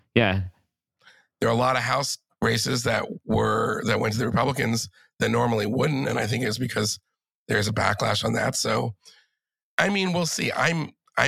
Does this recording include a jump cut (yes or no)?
no